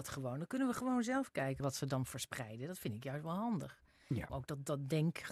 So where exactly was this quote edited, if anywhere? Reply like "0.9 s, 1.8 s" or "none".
1.6 s, 4.3 s